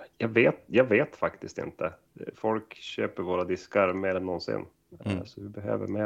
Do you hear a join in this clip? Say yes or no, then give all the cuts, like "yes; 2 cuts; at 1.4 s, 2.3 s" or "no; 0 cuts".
yes; 1 cut; at 2.3 s